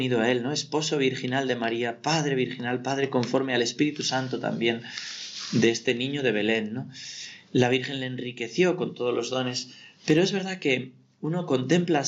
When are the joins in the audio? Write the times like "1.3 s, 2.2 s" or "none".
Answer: none